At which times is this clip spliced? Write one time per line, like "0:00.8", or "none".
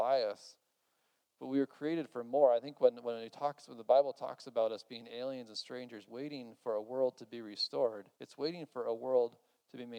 0:06.1
0:08.1